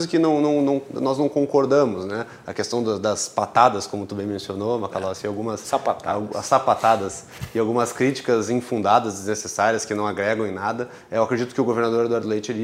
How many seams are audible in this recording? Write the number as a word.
zero